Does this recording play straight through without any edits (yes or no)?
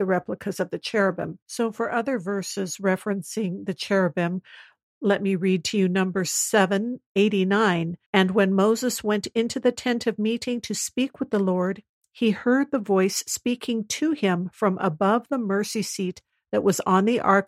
no